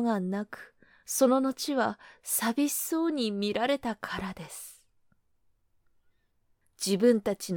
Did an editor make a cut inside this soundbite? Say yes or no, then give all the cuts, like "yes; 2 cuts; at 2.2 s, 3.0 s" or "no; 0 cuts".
yes; 1 cut; at 6.6 s